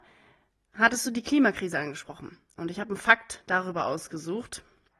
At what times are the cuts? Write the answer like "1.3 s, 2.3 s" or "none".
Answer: none